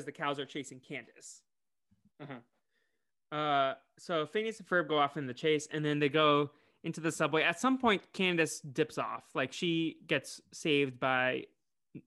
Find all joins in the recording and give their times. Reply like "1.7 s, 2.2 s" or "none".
2.1 s